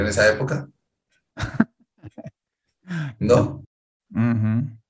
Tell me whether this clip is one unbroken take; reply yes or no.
no